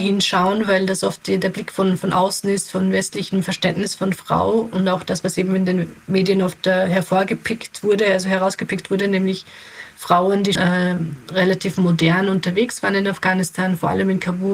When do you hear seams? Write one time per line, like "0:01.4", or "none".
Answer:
0:10.6